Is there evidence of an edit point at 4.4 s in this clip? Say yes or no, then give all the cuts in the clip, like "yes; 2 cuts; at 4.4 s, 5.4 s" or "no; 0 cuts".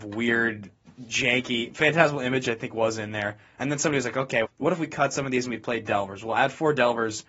yes; 1 cut; at 4.4 s